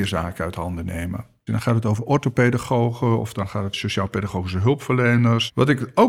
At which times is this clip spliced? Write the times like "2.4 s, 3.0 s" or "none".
1.5 s